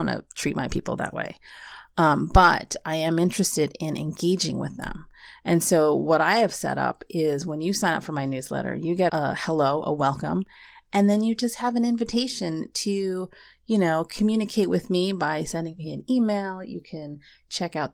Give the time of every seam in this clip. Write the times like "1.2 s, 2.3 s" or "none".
9.1 s